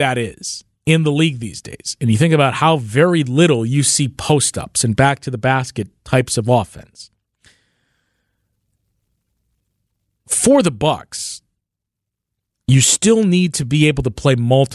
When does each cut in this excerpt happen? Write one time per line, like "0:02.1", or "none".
none